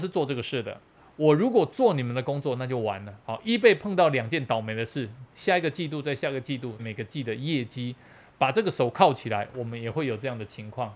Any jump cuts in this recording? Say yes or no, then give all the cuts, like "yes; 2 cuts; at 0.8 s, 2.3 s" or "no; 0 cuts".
yes; 3 cuts; at 3.2 s, 5.3 s, 6.8 s